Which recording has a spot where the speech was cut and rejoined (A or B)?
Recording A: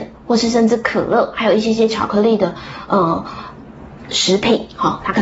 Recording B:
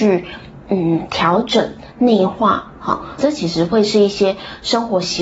B